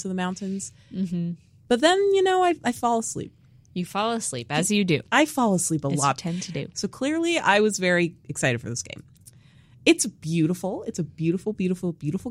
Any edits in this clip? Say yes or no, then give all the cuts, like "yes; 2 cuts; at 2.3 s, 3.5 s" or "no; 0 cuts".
yes; 1 cut; at 6.7 s